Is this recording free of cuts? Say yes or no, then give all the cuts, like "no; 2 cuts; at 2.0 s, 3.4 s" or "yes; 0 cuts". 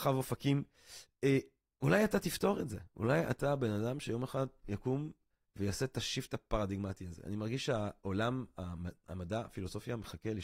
yes; 0 cuts